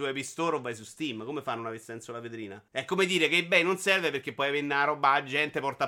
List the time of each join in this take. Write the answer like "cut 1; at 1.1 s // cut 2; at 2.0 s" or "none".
cut 1; at 2.7 s